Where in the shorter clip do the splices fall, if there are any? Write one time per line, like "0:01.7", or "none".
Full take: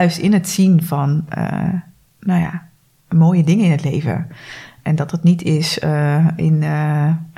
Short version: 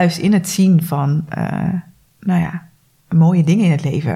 none